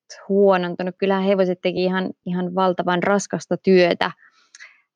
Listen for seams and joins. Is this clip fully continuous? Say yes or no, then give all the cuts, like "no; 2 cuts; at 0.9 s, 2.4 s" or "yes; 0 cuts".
yes; 0 cuts